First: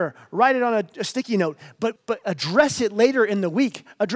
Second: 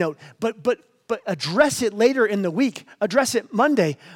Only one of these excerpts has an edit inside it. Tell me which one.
first; 1 cut; at 2.0 s

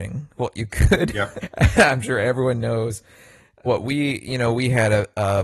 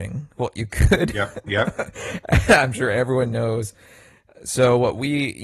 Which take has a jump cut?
first; 2 cuts; at 1.4 s, 3.7 s

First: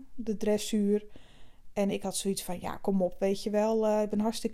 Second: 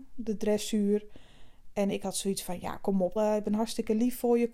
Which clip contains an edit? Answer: second; 1 cut; at 3.2 s

